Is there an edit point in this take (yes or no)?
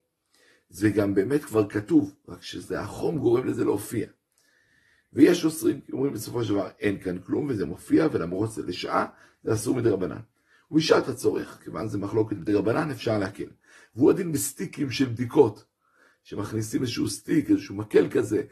no